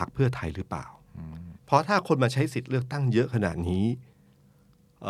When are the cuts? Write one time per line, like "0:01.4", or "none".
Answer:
0:01.6